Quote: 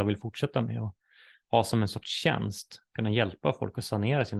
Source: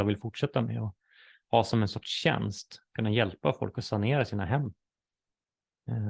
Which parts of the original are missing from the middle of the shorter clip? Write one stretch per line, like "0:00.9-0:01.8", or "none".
none